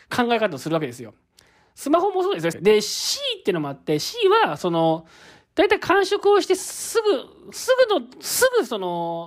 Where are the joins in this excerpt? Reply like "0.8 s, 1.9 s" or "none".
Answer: 2.5 s